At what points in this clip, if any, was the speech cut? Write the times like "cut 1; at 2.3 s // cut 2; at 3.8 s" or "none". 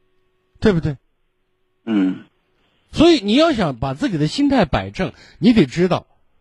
none